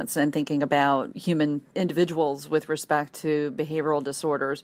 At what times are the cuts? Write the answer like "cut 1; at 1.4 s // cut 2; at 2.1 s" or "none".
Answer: none